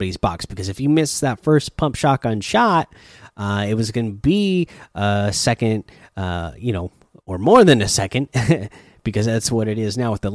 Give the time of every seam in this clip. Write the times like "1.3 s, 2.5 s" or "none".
none